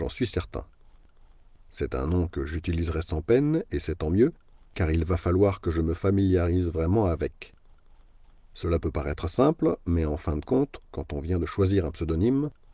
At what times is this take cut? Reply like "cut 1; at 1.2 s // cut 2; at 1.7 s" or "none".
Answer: none